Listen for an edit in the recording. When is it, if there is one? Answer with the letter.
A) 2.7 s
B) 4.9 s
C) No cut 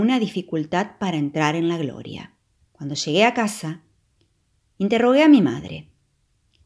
A